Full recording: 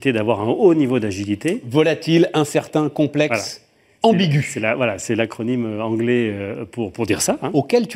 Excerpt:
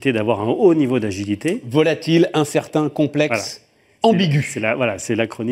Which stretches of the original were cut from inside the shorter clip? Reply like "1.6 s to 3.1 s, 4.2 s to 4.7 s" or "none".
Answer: none